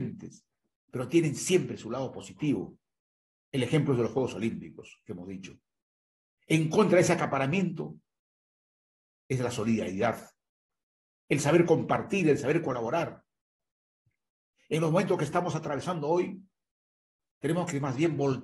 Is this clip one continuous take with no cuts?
yes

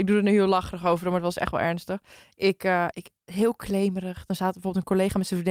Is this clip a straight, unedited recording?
no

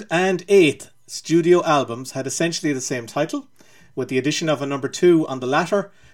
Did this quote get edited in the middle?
no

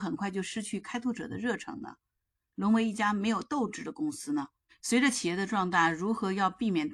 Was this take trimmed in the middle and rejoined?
no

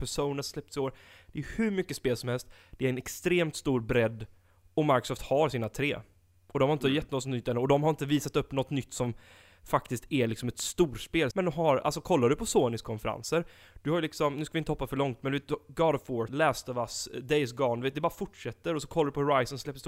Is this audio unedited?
no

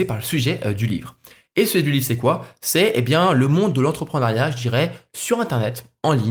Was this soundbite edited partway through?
no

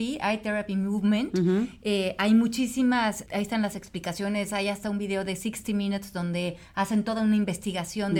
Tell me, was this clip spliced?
yes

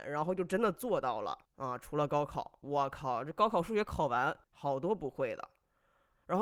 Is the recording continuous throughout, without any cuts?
no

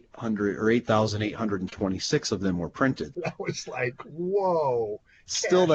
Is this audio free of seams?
no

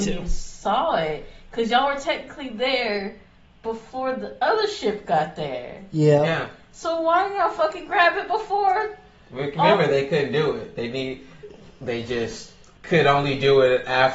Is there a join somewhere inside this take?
no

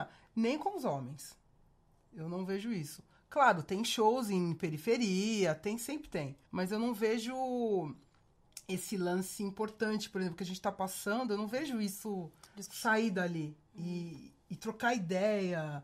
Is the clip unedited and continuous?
no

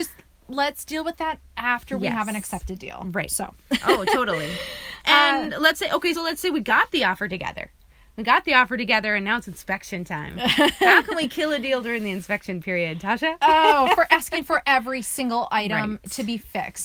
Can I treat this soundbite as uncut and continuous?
no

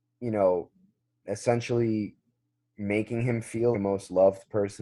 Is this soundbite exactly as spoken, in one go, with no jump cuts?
no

